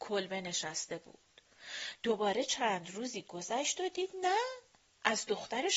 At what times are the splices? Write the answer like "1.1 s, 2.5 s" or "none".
none